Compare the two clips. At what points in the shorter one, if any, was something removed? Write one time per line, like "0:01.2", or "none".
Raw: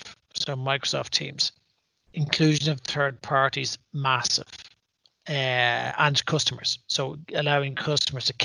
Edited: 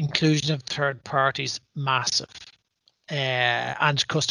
none